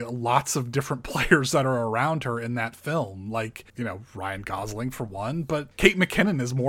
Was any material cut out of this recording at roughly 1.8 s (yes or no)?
no